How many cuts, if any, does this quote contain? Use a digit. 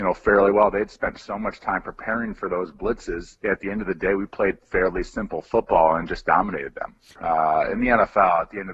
2